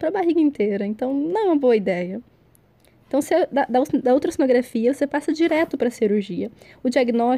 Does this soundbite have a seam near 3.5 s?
no; 0 cuts

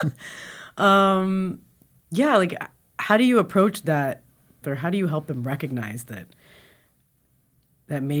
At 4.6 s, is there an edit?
yes; 1 cut; at 4.6 s

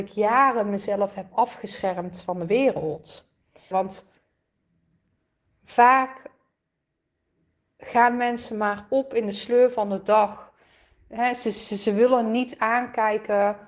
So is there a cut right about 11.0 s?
no; 1 cut; at 3.7 s

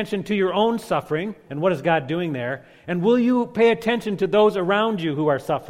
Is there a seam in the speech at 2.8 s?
no; 1 cut; at 1.5 s

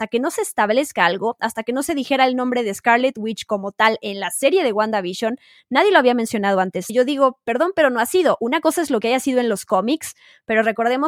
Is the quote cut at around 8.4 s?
no; 1 cut; at 6.9 s

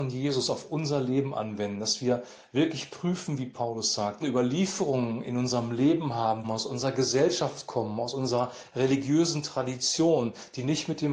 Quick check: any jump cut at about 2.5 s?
no; 2 cuts; at 4.2 s, 6.4 s

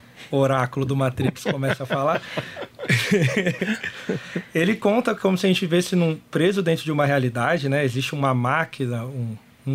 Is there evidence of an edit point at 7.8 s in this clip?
no; 0 cuts

